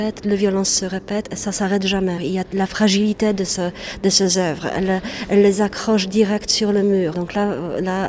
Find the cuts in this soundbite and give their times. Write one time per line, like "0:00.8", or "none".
0:02.2
0:07.1